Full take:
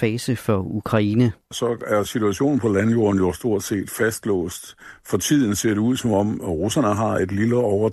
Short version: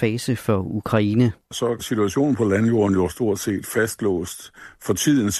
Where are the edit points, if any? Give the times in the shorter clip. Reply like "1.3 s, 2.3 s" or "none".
1.8 s